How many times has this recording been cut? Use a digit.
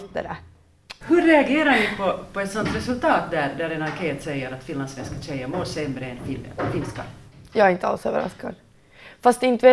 1